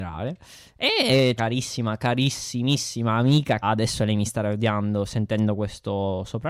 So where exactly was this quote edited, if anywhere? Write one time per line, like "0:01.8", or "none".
0:01.4
0:03.6